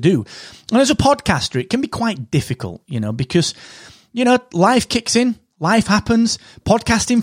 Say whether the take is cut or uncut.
uncut